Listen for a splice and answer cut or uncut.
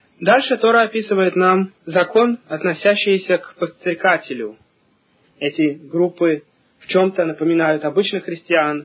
cut